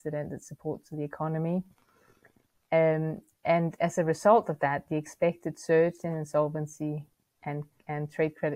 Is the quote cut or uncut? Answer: uncut